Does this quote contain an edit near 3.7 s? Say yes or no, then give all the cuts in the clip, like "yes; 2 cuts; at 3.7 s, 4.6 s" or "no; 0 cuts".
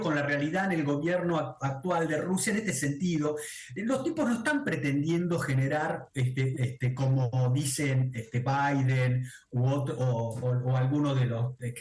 no; 1 cut; at 6.5 s